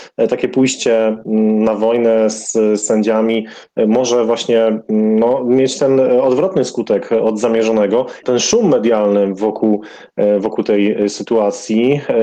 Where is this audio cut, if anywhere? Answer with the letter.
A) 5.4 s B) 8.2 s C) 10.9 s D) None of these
B